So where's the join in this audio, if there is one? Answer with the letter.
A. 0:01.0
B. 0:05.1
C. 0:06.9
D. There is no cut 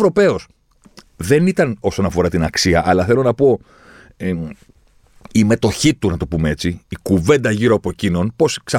D